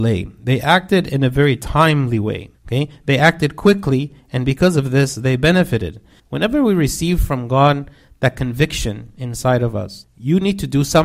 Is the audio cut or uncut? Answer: cut